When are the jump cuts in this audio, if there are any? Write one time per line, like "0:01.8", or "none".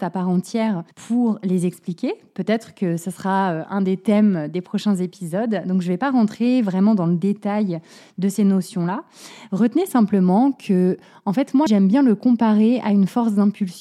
0:00.9
0:11.7